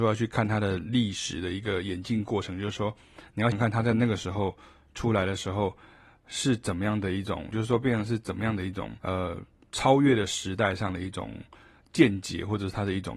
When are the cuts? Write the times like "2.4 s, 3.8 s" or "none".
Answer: 3.5 s, 7.5 s, 9.0 s